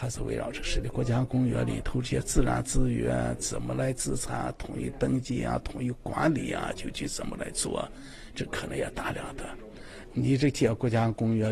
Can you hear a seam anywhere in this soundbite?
yes; 1 cut; at 10.0 s

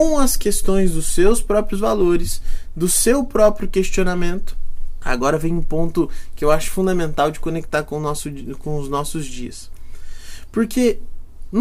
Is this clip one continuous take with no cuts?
no; 1 cut; at 5.0 s

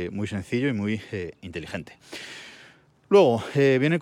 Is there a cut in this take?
no; 0 cuts

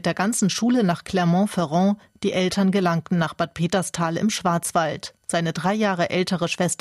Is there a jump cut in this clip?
no; 0 cuts

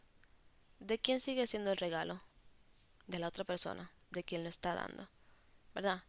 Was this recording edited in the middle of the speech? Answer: no; 0 cuts

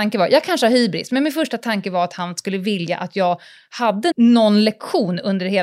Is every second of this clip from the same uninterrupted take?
no; 1 cut; at 4.1 s

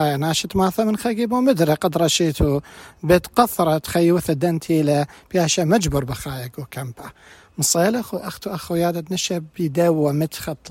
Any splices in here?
no; 0 cuts

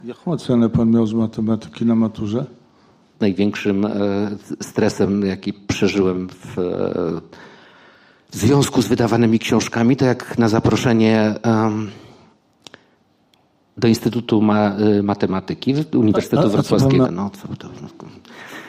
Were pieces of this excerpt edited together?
yes; 2 cuts; at 3.1 s, 17.0 s

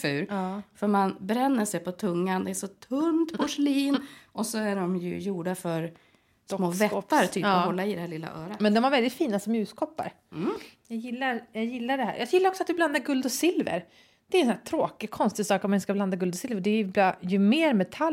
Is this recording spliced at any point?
no; 0 cuts

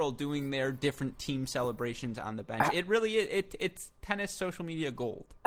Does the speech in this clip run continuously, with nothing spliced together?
yes; 0 cuts

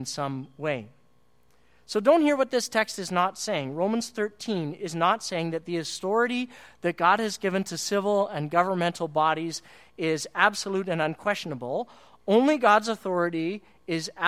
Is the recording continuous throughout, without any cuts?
yes; 0 cuts

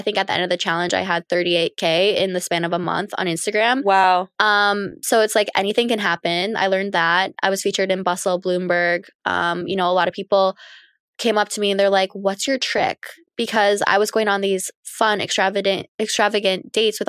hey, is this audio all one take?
yes; 0 cuts

